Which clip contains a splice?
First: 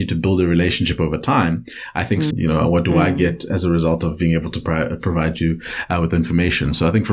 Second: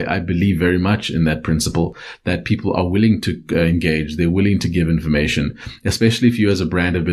first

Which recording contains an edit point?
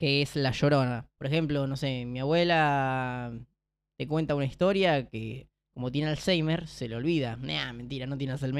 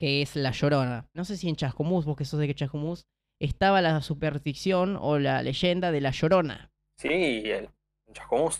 first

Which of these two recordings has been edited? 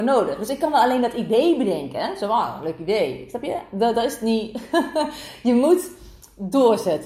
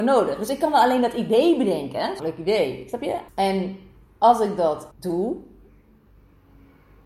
second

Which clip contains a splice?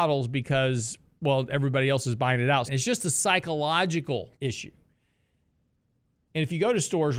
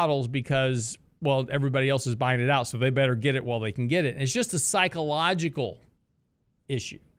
first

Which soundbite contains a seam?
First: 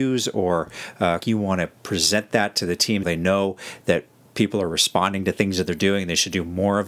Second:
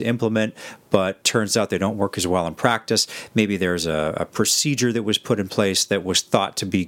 first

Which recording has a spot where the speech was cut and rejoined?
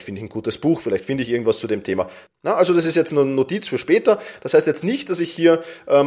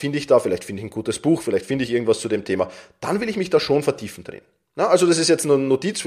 first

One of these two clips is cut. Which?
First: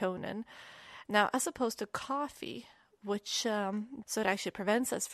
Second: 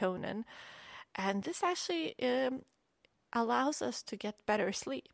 first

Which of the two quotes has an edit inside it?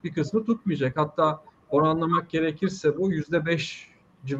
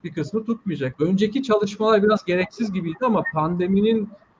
second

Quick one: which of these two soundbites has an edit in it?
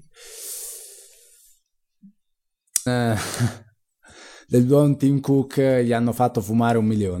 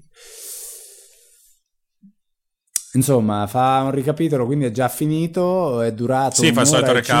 first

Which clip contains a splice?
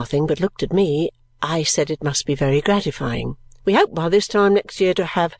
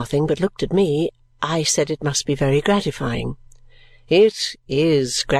first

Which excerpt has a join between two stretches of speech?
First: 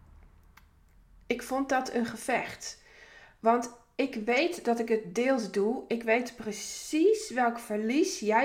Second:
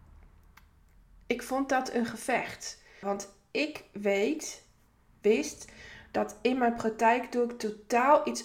second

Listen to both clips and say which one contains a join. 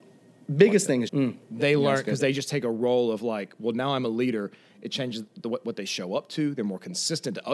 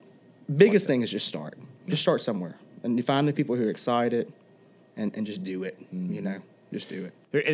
first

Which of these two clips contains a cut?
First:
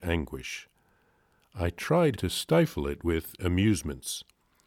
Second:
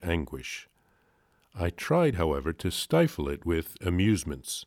first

